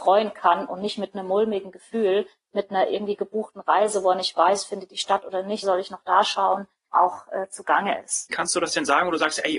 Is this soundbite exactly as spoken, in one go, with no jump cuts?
no; 3 cuts; at 5.6 s, 6.9 s, 8.3 s

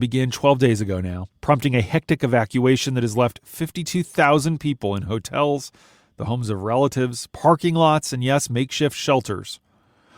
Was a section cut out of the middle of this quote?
yes; 1 cut; at 1.4 s

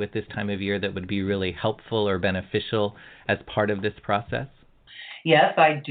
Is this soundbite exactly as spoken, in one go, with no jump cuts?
yes; 0 cuts

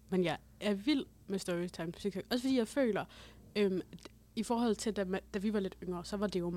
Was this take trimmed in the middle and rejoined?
no; 0 cuts

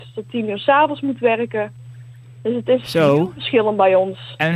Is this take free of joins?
yes; 0 cuts

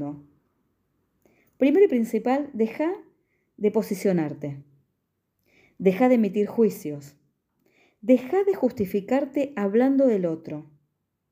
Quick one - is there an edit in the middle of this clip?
no; 0 cuts

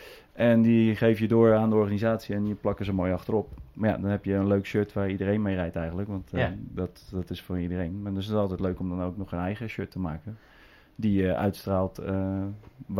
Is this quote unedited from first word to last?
yes; 0 cuts

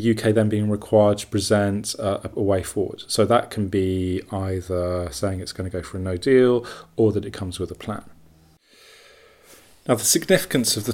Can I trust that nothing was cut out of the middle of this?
yes; 0 cuts

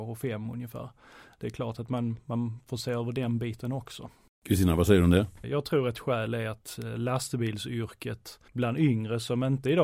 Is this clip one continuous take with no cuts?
no; 2 cuts; at 5.4 s, 8.5 s

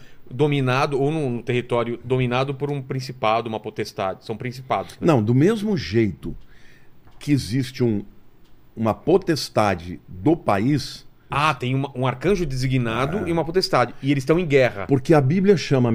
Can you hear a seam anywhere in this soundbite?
yes; 2 cuts; at 11.3 s, 14.9 s

